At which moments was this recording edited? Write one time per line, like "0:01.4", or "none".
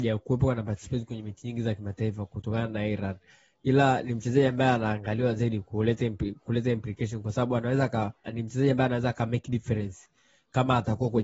0:08.2